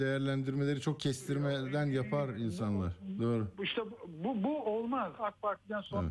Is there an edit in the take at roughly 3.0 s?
no; 1 cut; at 5.2 s

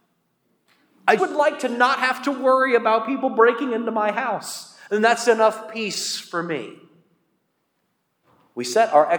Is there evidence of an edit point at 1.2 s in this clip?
yes; 1 cut; at 1.2 s

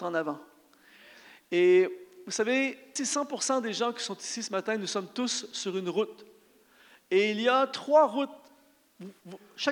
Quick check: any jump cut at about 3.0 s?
yes; 1 cut; at 3.0 s

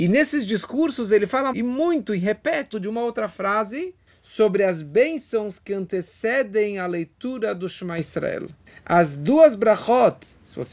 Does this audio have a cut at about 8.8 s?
no; 2 cuts; at 1.5 s, 2.7 s

